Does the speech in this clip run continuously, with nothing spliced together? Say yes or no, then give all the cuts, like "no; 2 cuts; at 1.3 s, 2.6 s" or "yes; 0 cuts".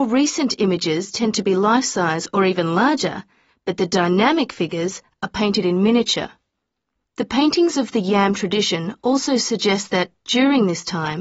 no; 1 cut; at 7.0 s